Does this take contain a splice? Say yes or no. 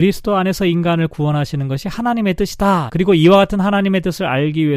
yes